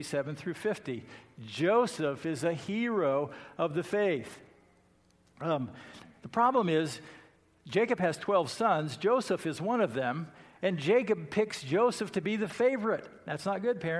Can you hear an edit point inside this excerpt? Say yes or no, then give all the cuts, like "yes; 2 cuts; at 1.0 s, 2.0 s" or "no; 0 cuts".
no; 0 cuts